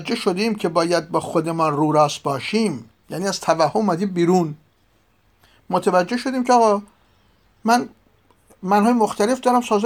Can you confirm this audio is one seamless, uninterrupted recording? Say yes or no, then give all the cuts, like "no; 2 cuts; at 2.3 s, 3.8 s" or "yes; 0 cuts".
no; 1 cut; at 3.0 s